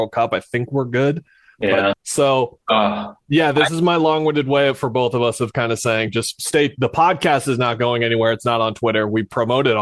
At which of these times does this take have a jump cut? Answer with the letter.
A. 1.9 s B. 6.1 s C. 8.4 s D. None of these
A